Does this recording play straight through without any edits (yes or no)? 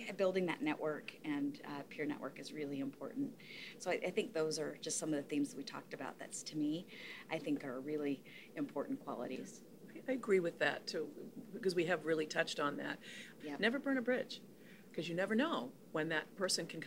no